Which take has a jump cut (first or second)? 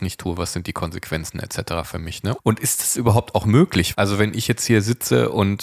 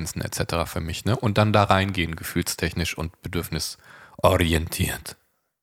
first